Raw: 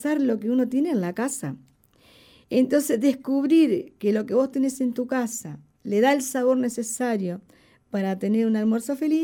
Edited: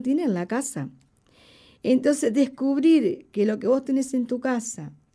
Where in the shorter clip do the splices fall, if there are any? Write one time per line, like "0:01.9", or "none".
none